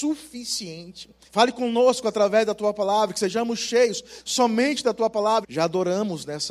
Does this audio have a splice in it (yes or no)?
yes